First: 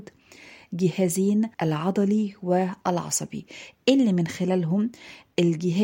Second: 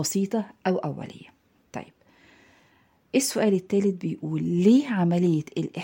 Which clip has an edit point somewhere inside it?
first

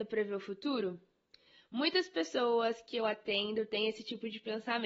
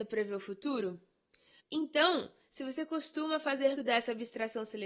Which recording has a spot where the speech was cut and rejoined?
second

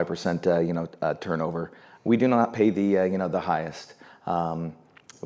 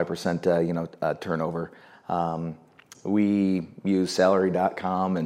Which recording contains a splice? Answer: second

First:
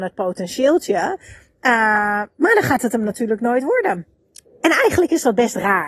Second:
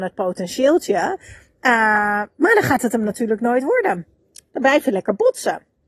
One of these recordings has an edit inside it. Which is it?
first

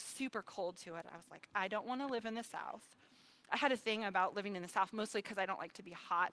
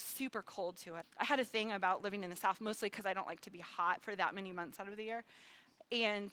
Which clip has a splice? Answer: second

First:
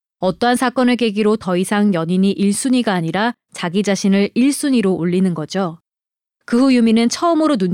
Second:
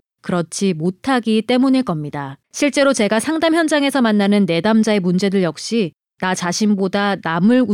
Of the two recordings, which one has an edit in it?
second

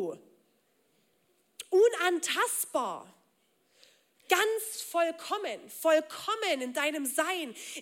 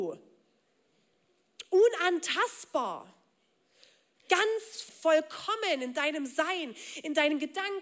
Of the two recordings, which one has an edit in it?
second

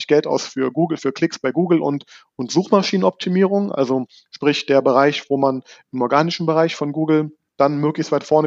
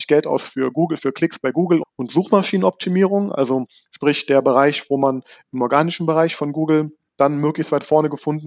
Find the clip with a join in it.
second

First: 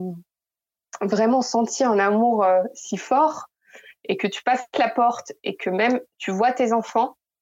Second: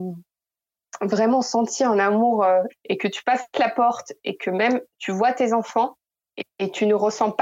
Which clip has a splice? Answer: second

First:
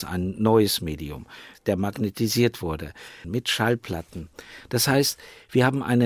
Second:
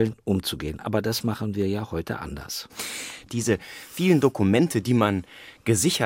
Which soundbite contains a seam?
first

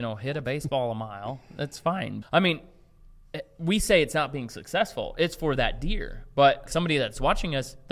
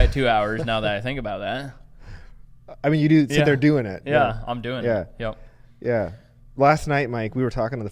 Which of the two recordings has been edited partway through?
first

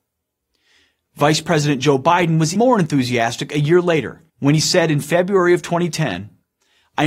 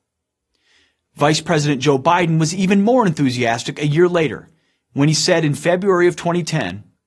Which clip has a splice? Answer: first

